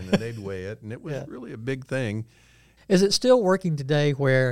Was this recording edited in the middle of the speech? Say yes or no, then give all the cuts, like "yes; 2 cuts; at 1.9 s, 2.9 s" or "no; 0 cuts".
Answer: yes; 1 cut; at 2.8 s